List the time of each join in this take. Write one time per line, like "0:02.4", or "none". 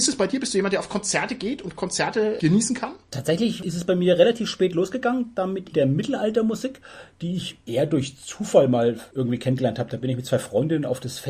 0:05.7

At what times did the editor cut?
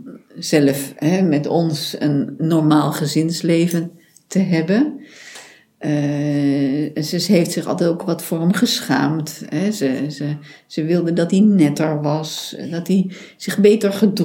none

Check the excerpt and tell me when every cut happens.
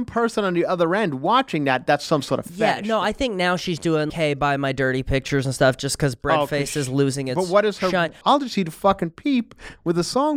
0:04.1
0:08.2

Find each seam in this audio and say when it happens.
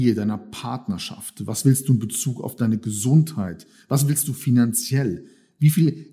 none

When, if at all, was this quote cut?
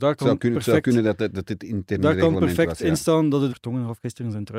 0:03.5

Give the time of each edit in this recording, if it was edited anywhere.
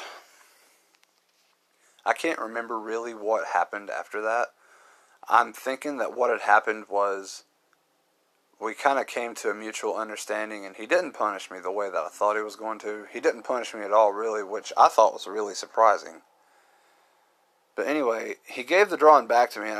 none

